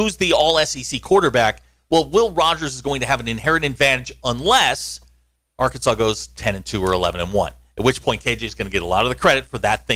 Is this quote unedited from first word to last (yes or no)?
yes